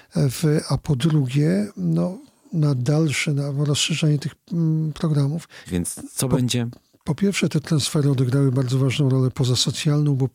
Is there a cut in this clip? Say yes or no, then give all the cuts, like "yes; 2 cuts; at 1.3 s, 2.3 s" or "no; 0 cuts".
yes; 1 cut; at 5.6 s